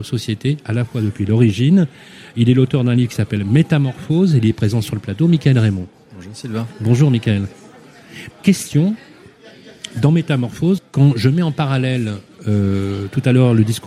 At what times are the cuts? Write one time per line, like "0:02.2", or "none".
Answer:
0:08.3
0:10.8